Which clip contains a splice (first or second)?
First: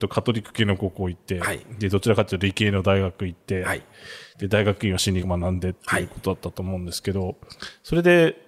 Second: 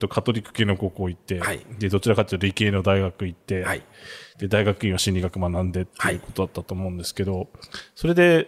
first